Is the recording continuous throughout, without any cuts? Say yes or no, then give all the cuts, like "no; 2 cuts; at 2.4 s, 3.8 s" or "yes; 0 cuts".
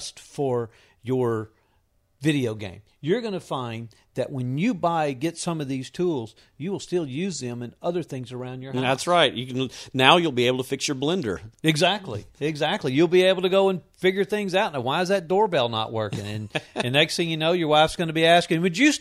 yes; 0 cuts